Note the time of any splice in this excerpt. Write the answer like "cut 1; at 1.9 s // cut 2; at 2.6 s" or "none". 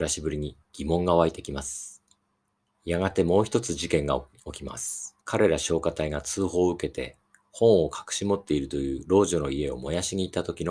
cut 1; at 2.7 s // cut 2; at 5.2 s